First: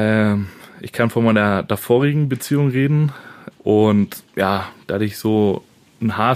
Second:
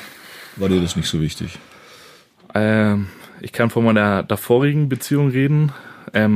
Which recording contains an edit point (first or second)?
first